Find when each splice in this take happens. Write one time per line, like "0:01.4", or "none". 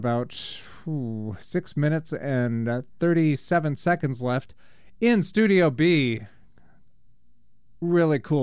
none

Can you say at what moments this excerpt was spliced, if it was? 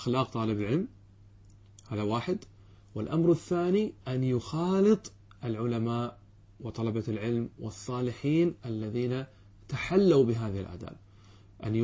0:04.0

